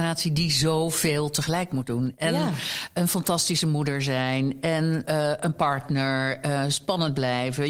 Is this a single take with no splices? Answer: yes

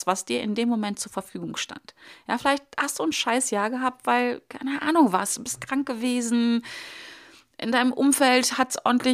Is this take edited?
no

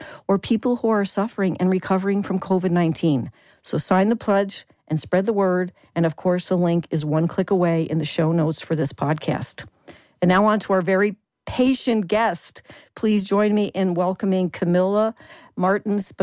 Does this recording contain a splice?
no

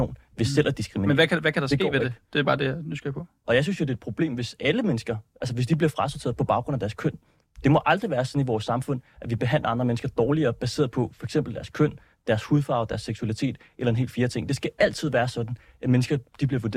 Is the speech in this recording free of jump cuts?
no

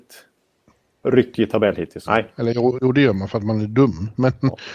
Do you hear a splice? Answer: yes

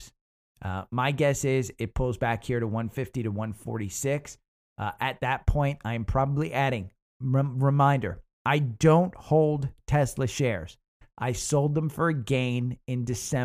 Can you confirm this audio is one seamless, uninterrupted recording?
yes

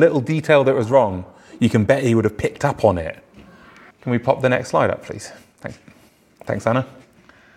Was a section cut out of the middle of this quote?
yes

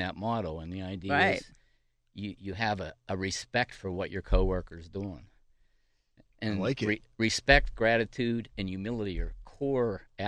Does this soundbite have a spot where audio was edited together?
no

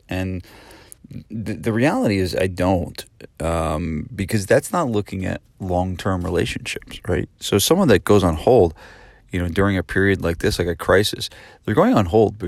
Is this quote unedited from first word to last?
yes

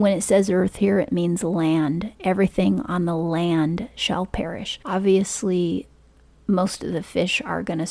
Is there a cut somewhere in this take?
no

